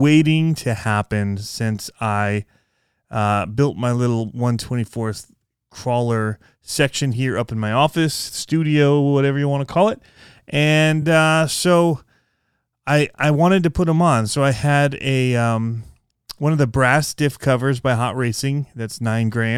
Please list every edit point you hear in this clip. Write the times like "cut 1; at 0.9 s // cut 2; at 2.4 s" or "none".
none